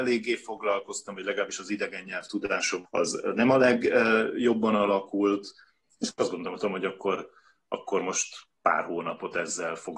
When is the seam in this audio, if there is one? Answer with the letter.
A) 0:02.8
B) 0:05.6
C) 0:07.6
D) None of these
A